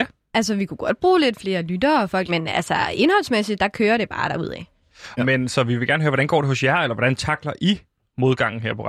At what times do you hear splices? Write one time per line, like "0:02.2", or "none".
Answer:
0:02.3
0:05.2